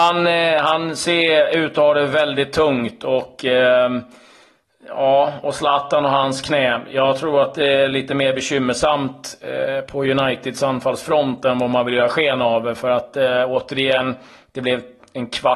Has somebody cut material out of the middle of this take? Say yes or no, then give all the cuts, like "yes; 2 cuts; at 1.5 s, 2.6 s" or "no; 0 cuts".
no; 0 cuts